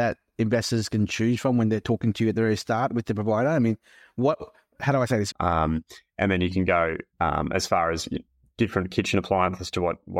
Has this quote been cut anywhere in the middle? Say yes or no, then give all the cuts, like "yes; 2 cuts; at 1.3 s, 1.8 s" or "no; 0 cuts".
yes; 2 cuts; at 5.3 s, 7.1 s